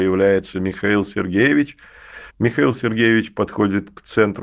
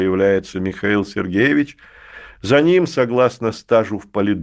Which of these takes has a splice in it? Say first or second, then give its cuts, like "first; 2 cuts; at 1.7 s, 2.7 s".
first; 1 cut; at 2.3 s